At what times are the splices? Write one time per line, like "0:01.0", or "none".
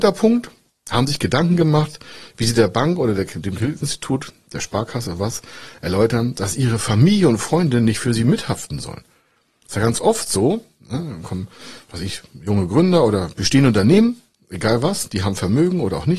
none